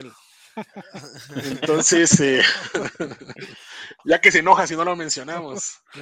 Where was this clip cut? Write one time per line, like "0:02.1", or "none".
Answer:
none